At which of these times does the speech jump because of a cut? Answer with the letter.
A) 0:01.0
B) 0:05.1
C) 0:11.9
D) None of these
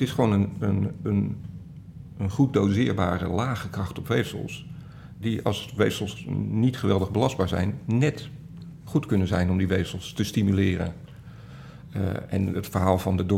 D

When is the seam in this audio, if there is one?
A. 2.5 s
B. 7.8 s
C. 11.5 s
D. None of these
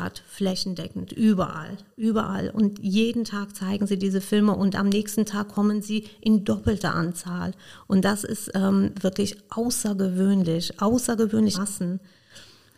C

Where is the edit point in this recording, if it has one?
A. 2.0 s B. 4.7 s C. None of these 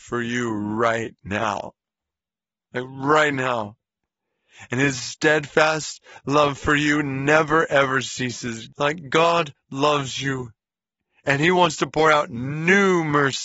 C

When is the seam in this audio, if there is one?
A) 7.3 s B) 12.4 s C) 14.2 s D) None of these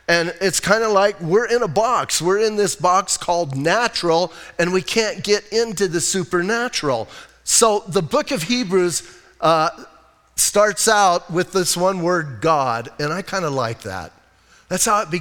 A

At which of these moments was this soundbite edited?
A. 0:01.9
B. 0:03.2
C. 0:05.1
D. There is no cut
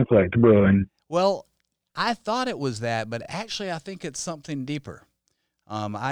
D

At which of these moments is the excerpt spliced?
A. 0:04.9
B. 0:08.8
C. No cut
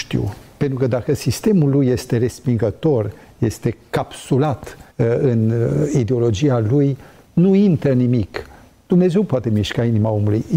A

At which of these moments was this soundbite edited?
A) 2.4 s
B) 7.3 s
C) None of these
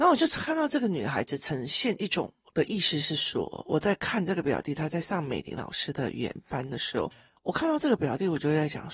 A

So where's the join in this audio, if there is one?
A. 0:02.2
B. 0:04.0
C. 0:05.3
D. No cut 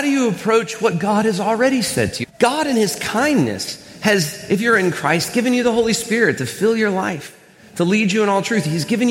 A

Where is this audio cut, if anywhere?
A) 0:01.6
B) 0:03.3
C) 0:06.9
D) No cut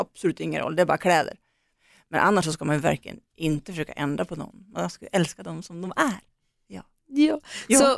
B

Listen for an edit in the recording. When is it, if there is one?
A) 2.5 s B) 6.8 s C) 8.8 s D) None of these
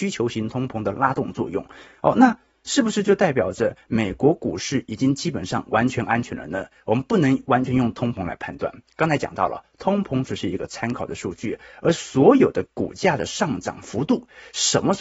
D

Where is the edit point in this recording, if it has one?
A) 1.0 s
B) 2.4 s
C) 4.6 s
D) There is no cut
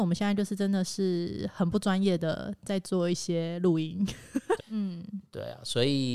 C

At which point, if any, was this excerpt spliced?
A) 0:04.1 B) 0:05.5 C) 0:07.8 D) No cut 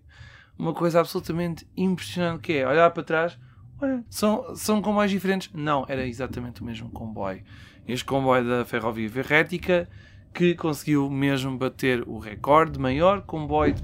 A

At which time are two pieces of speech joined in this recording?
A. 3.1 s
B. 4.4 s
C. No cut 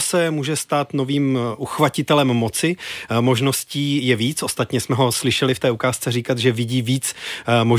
C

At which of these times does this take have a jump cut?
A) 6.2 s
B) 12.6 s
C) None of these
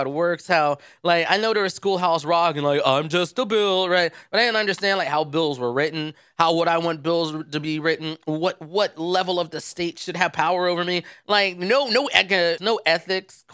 B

